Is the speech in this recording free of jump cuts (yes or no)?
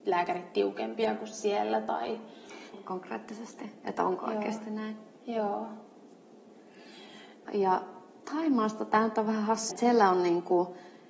no